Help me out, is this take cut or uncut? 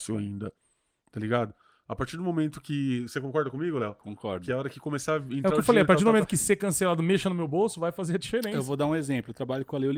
uncut